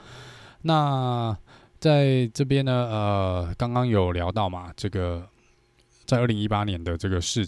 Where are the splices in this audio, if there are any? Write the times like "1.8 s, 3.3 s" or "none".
none